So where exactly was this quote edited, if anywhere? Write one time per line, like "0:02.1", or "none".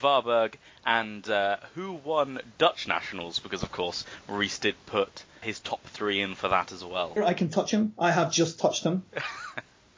0:05.4
0:07.2